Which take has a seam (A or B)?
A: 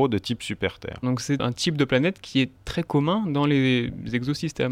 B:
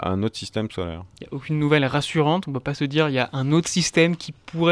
A